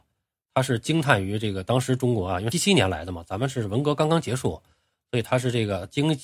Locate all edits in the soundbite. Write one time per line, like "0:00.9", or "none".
0:02.5